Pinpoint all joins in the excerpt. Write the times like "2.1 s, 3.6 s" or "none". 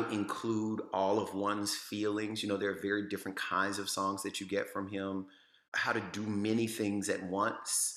none